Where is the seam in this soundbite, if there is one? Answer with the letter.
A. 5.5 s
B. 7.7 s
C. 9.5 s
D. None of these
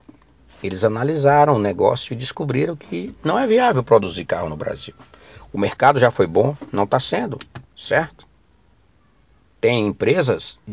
B